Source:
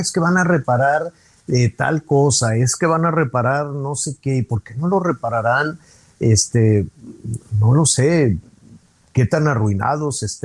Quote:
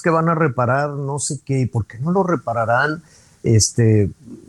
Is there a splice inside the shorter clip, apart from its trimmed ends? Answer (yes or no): no